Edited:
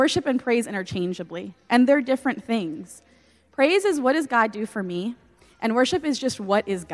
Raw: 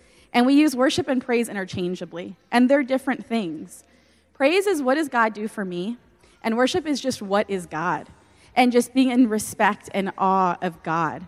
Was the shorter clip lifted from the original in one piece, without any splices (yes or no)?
yes